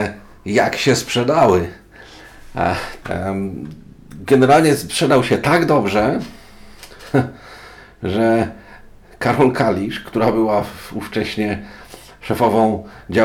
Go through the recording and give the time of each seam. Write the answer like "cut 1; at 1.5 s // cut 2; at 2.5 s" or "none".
cut 1; at 3.0 s

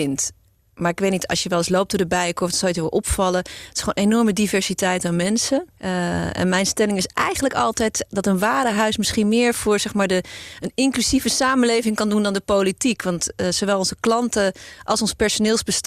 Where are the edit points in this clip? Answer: cut 1; at 5.8 s

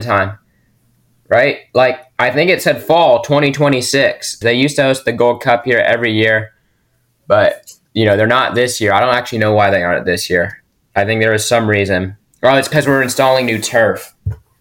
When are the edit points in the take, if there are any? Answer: cut 1; at 4.4 s

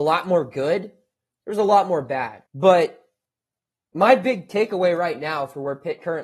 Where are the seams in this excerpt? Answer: cut 1; at 2.5 s

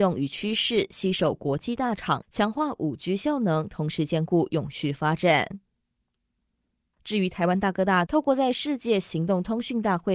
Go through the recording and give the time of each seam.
cut 1; at 2.2 s // cut 2; at 6.9 s // cut 3; at 8.1 s

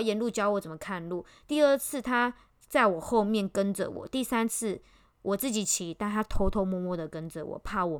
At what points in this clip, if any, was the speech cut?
none

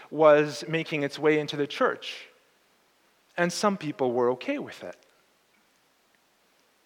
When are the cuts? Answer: none

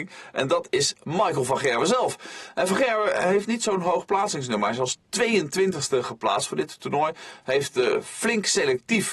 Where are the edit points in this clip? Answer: none

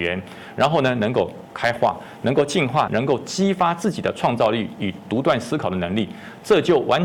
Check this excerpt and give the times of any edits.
cut 1; at 2.9 s

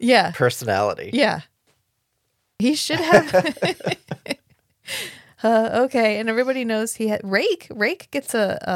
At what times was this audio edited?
none

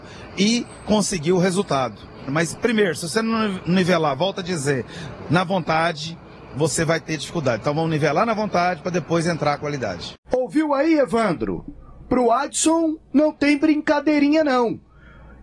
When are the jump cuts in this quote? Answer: cut 1; at 2.3 s

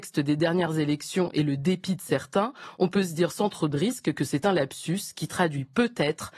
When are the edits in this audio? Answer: none

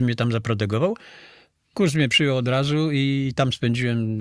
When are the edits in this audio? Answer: none

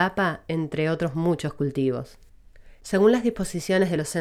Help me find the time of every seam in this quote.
cut 1; at 2.8 s

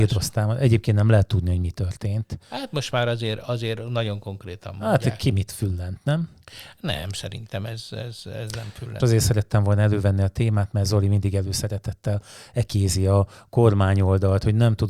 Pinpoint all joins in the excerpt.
cut 1; at 9.0 s

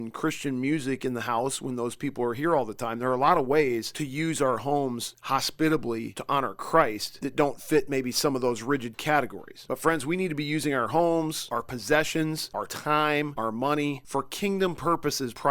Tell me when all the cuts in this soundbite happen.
cut 1; at 13.3 s

